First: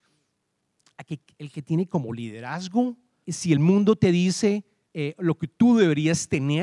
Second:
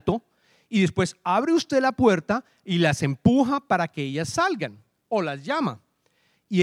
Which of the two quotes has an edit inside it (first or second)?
first